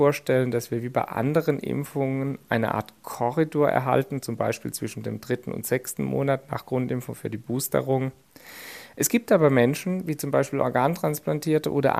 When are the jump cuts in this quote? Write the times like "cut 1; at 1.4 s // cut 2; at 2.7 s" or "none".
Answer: none